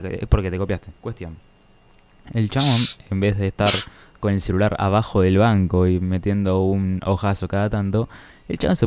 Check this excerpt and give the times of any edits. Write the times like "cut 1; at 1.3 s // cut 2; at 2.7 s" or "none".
cut 1; at 1.0 s